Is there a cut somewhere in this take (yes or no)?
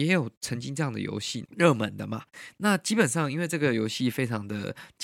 yes